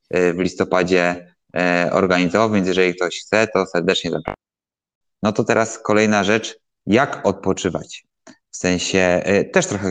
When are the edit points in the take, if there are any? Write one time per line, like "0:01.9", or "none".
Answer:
0:05.1